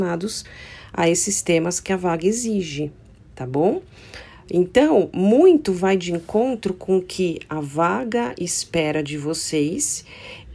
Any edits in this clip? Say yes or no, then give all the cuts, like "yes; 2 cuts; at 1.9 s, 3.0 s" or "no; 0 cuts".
no; 0 cuts